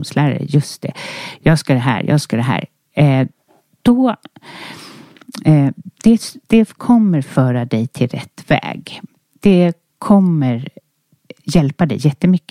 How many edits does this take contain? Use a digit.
0